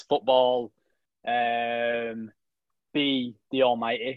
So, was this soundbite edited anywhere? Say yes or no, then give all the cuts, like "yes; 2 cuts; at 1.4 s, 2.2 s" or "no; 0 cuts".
yes; 1 cut; at 2.9 s